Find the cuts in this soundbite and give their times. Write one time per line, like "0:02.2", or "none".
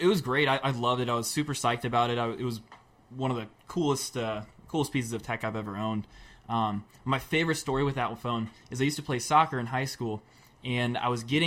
none